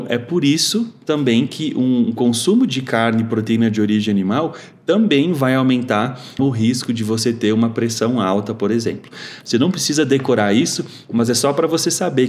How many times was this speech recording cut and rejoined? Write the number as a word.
two